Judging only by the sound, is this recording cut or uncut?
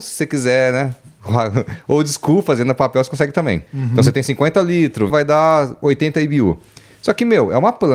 cut